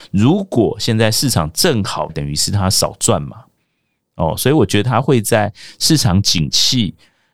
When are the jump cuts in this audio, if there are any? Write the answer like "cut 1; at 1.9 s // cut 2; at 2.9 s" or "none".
cut 1; at 2.1 s